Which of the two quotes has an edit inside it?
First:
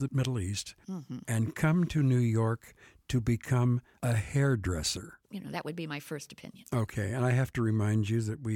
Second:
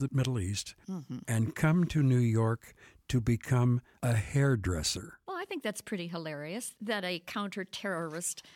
first; 1 cut; at 5.2 s

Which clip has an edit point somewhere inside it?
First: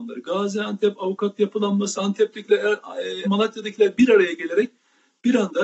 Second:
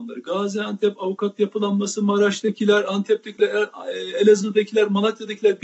first; 2 cuts; at 2.0 s, 3.2 s

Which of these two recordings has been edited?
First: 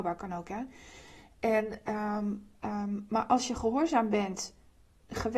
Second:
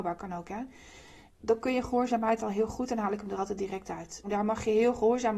second; 2 cuts; at 1.3 s, 4.2 s

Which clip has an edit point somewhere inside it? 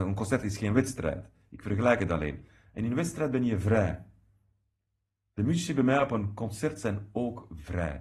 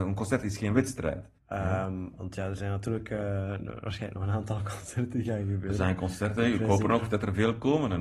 second; 1 cut; at 1.4 s

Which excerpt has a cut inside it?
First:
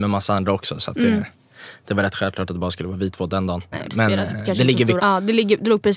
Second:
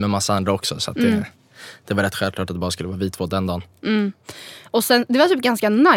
first; 2 cuts; at 3.7 s, 5.0 s

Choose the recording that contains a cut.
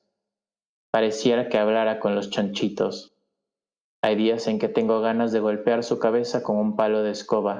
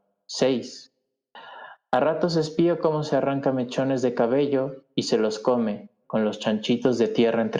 second; 1 cut; at 6.0 s

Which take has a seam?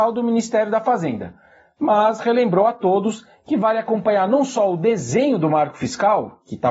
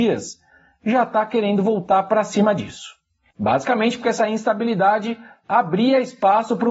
second; 1 cut; at 3.3 s

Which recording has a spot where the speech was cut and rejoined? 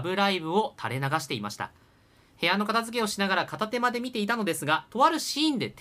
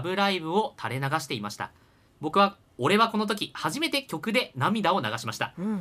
second; 1 cut; at 2.1 s

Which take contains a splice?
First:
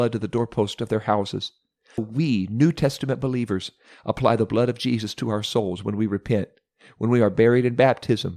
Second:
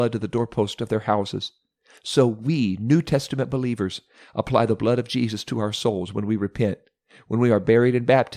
first; 1 cut; at 2.0 s

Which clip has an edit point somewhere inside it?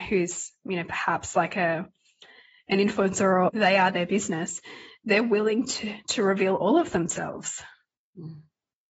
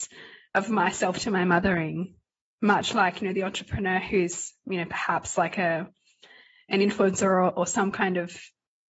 first; 1 cut; at 3.5 s

